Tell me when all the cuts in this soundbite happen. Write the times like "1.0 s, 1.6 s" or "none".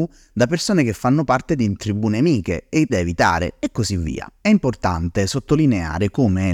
2.9 s